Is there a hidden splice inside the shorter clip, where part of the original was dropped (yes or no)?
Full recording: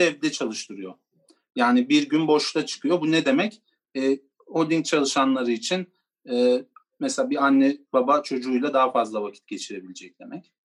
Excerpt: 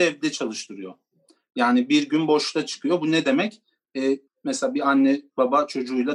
yes